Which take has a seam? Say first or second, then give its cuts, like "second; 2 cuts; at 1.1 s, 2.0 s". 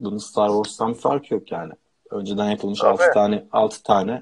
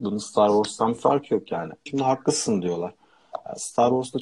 second; 1 cut; at 1.9 s